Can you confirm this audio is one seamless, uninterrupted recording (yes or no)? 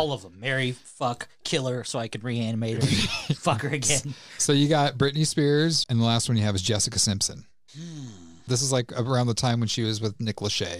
no